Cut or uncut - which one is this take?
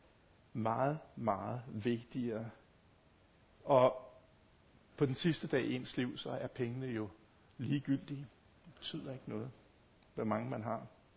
uncut